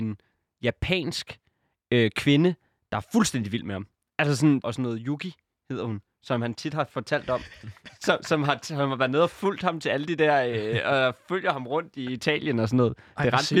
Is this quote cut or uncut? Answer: cut